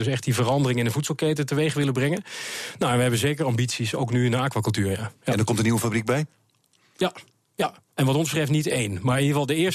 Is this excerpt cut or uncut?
uncut